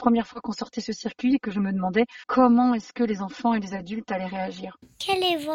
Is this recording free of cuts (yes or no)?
yes